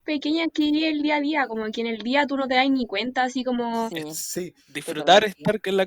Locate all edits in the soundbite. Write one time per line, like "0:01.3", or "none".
0:03.9